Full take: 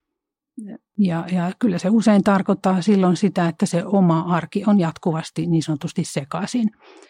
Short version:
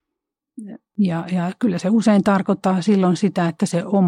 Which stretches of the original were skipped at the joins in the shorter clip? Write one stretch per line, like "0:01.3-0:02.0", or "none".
none